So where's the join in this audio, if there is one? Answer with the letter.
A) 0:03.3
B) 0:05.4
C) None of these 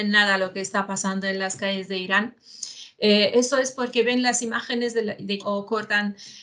B